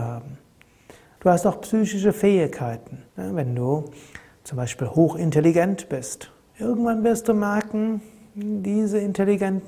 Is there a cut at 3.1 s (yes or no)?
yes